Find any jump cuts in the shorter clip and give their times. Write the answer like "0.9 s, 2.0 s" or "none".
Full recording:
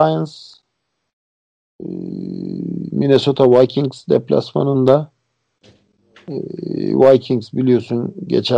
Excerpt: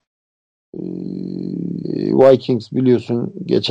1.8 s